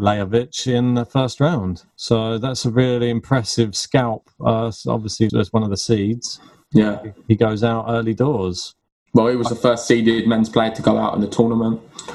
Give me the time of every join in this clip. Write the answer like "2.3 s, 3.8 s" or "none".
5.3 s